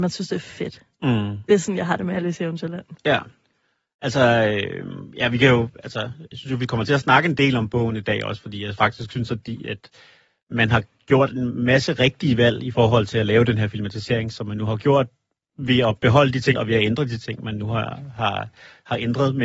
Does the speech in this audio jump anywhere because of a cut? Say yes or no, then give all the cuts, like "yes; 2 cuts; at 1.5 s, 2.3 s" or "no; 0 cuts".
yes; 1 cut; at 16.5 s